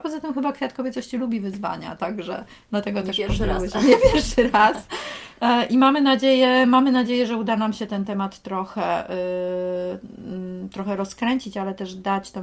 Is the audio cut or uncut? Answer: uncut